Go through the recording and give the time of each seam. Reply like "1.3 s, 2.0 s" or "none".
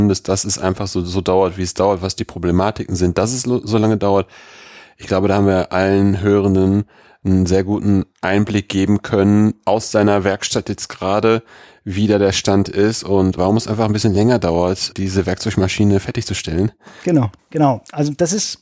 13.4 s, 14.9 s, 17.4 s